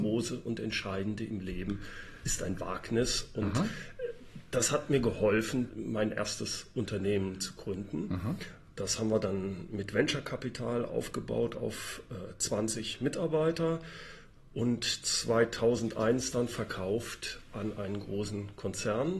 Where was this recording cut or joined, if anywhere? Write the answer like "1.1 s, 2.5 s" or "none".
5.7 s

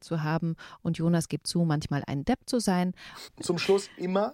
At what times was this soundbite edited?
3.3 s

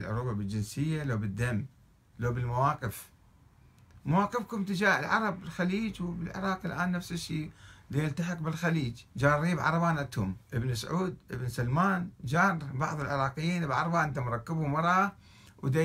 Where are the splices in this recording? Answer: 9.1 s, 10.4 s

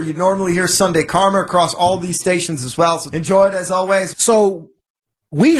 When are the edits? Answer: 3.1 s, 4.1 s

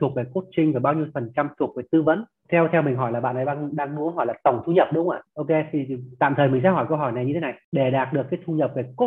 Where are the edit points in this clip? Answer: none

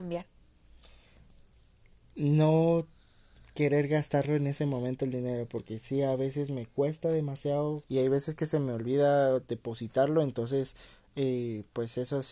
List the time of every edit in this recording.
7.8 s

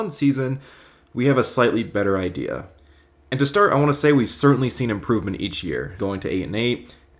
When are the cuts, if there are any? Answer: 6.0 s

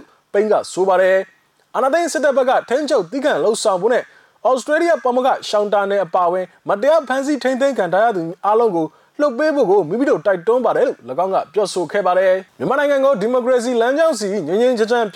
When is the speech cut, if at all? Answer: 12.5 s

